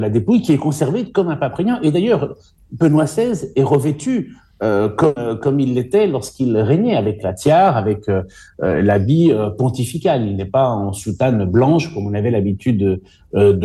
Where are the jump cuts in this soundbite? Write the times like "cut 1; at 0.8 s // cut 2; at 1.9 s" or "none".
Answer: none